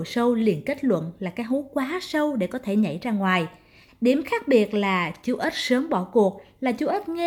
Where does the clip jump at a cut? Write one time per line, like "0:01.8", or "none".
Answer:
0:03.9